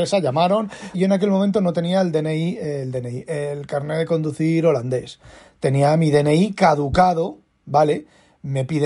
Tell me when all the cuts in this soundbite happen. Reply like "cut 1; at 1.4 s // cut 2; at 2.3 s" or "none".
cut 1; at 0.9 s